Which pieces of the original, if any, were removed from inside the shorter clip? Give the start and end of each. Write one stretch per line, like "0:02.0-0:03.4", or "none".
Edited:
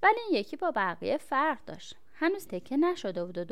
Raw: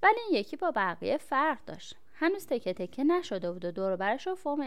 0:02.5-0:02.7